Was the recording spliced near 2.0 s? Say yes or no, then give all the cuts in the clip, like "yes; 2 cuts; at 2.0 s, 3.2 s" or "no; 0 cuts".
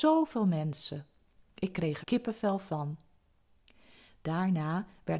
yes; 1 cut; at 2.0 s